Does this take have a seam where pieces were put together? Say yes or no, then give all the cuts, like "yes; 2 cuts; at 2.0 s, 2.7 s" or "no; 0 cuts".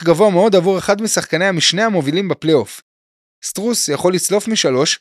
yes; 1 cut; at 3.3 s